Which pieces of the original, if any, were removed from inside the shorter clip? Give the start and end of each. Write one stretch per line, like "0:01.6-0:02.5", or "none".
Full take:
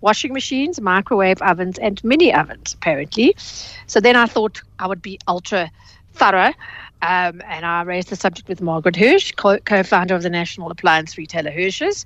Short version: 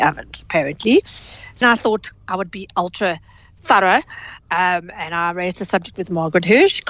0:03.9-0:04.1

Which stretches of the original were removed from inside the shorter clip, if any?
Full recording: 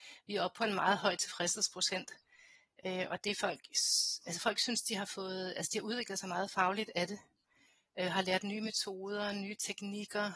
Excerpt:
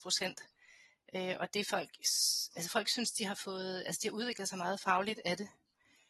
none

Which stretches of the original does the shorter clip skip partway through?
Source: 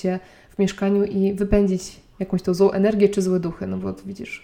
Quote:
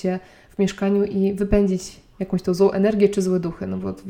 none

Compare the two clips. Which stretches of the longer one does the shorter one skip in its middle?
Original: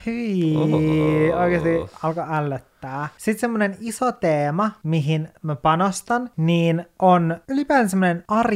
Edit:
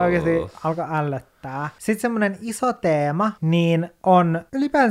0:04.8-0:06.3

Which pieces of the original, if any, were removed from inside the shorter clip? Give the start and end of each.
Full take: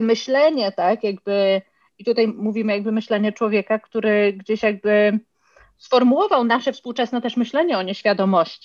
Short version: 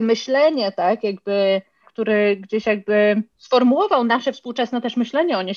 0:01.8-0:03.8
0:05.3-0:05.7

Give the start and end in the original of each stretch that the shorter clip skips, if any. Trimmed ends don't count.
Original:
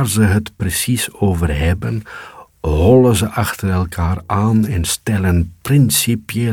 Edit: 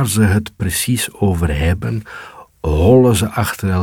none

